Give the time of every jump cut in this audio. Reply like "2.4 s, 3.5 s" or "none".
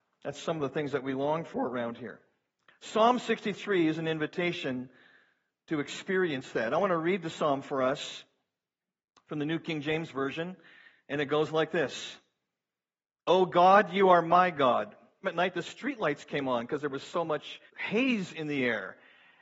15.2 s, 17.7 s